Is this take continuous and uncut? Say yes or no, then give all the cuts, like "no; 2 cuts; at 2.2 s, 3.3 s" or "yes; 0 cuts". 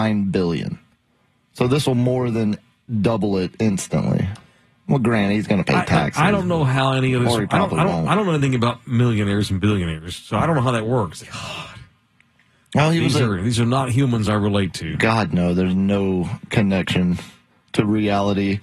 no; 1 cut; at 11.2 s